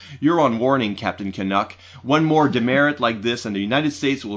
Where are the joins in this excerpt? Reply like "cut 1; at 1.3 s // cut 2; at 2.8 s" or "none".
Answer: none

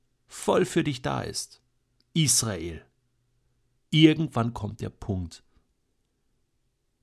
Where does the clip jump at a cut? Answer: cut 1; at 3.8 s

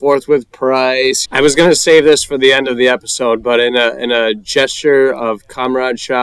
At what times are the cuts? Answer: cut 1; at 1.3 s

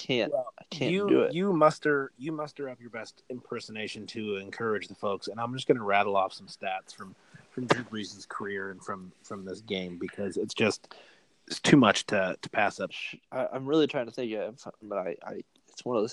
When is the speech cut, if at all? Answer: cut 1; at 12.9 s // cut 2; at 14.8 s

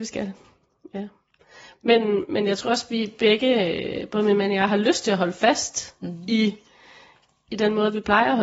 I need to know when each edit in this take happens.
none

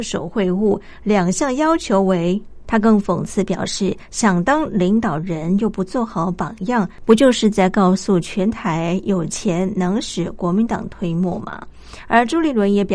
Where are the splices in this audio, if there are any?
cut 1; at 2.6 s

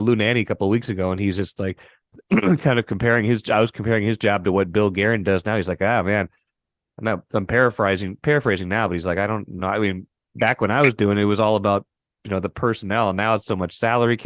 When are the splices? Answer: none

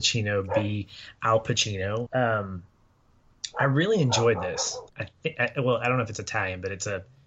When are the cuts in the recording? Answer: cut 1; at 2.1 s // cut 2; at 4.9 s

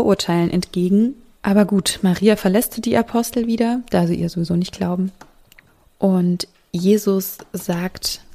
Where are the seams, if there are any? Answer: cut 1; at 1.4 s

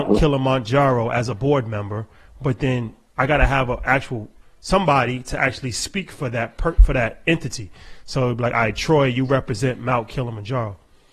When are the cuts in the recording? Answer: none

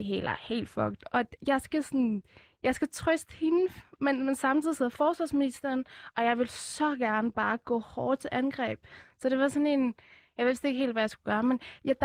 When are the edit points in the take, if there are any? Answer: none

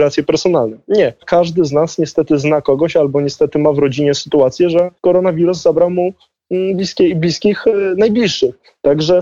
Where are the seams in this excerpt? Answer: cut 1; at 1.2 s // cut 2; at 5.0 s

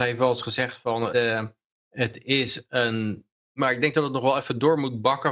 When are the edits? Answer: cut 1; at 1.1 s // cut 2; at 3.5 s

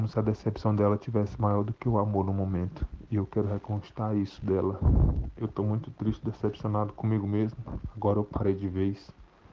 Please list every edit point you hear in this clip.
none

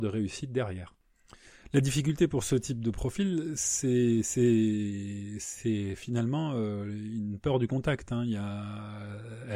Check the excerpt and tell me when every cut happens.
none

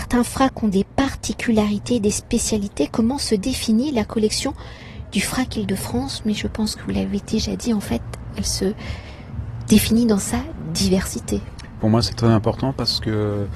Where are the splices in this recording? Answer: cut 1; at 11.8 s

